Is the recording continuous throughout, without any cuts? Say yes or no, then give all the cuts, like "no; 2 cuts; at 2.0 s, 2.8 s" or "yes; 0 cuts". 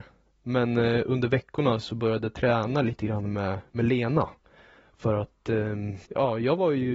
no; 1 cut; at 6.1 s